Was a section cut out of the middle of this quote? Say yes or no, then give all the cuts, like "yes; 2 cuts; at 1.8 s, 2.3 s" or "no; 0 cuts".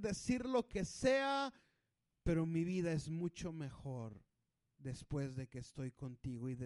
no; 0 cuts